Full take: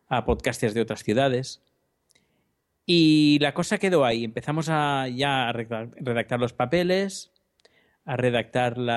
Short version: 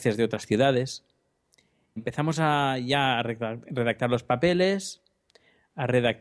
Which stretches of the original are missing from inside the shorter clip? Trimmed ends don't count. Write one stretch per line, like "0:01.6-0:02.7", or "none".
0:02.5-0:04.3